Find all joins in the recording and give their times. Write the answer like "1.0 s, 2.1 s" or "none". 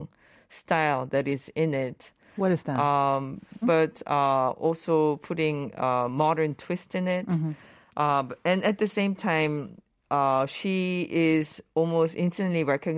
3.6 s